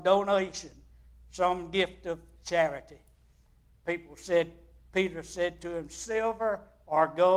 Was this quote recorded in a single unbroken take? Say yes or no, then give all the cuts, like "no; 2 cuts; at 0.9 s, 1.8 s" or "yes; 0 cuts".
yes; 0 cuts